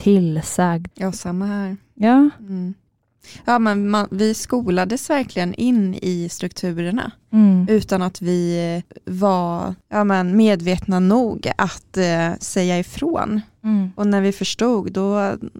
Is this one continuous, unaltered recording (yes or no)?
no